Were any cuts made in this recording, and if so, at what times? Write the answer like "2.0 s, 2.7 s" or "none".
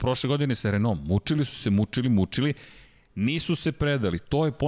none